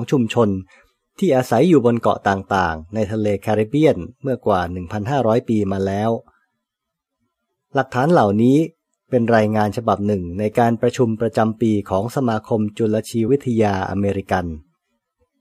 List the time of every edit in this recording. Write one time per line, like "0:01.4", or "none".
0:13.3